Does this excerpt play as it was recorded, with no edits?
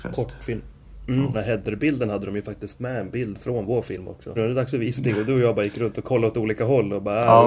no; 2 cuts; at 1.3 s, 4.4 s

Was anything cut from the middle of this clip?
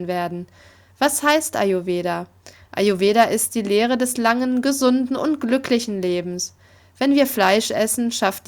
no; 0 cuts

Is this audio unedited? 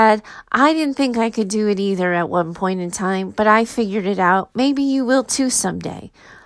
yes; 0 cuts

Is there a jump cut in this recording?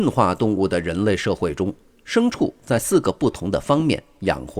no; 0 cuts

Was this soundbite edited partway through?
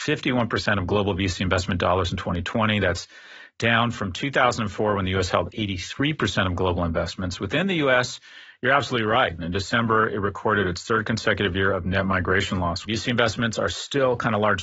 yes; 2 cuts; at 9.4 s, 12.8 s

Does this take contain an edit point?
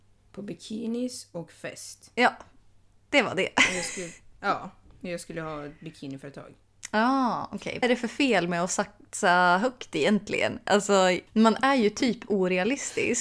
yes; 2 cuts; at 7.8 s, 11.3 s

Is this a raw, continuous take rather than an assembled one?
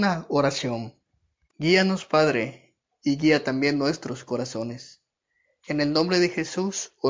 no; 1 cut; at 1.5 s

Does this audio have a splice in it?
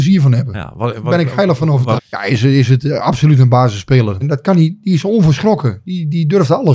yes; 2 cuts; at 2.0 s, 4.2 s

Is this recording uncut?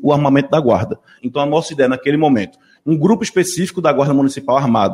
no; 2 cuts; at 1.2 s, 2.8 s

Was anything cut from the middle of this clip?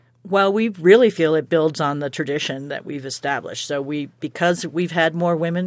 no; 0 cuts

